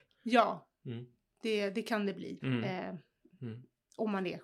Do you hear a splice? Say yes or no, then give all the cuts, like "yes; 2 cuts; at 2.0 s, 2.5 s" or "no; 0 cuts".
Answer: yes; 1 cut; at 2.4 s